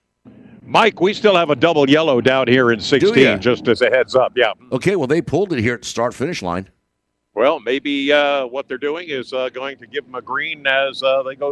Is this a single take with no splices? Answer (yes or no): yes